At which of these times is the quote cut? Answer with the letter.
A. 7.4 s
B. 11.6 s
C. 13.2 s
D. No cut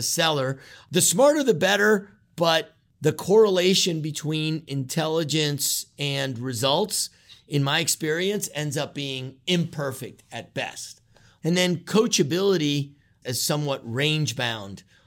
C